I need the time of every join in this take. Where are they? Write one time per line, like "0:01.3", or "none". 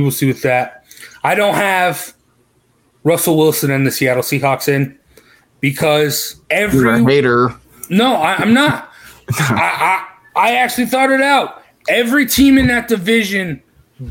0:06.4